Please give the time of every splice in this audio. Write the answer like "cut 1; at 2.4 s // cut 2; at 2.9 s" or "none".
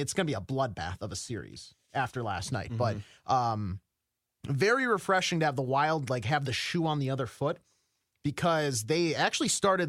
none

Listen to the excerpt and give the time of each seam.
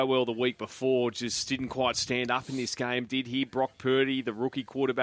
none

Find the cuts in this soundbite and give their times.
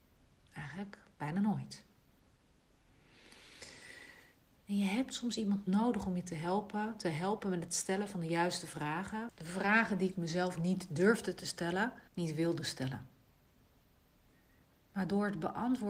cut 1; at 4.6 s // cut 2; at 9.3 s // cut 3; at 12.1 s

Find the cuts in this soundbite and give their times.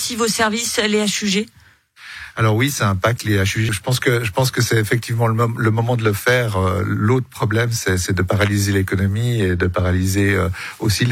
cut 1; at 3.7 s

